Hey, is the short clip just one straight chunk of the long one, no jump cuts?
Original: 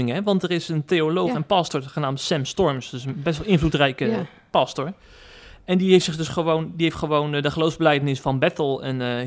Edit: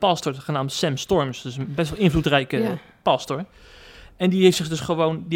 yes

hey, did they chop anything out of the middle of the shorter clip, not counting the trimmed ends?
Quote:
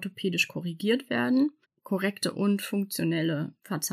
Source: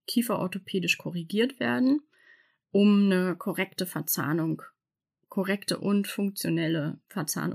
yes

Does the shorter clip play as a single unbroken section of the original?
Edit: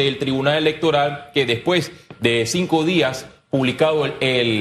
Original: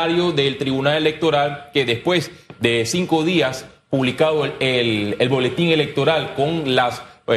yes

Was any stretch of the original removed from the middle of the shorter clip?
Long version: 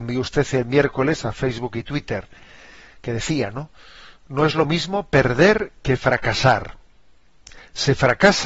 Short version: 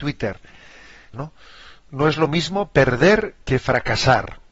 yes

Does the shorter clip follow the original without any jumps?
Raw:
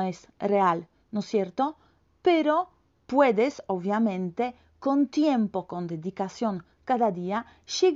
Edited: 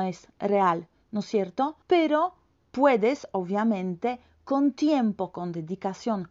no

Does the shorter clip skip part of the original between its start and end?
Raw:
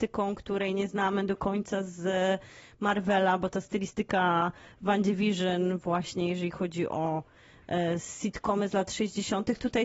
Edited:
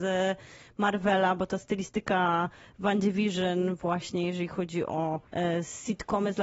yes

